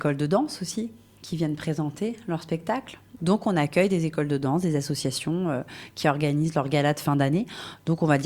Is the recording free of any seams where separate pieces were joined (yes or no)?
no